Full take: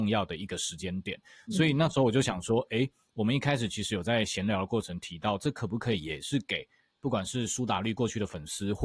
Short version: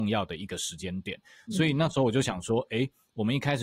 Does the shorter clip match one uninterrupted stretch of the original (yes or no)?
yes